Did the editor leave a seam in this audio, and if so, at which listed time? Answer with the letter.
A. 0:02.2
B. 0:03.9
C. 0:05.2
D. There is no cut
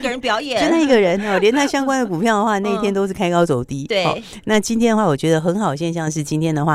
D